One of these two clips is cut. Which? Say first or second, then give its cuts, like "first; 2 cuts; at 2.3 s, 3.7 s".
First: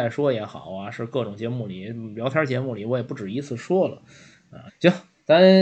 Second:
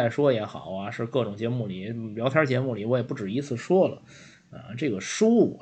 first; 1 cut; at 4.7 s